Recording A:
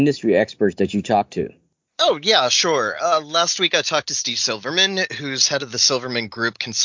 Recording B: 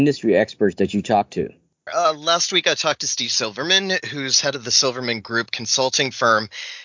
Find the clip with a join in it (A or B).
B